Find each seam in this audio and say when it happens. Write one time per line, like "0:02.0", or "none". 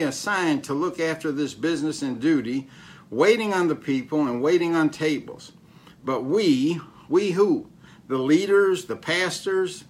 none